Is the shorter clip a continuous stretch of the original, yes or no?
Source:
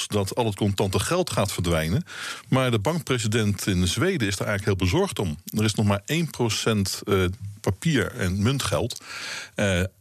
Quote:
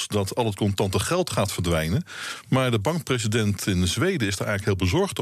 yes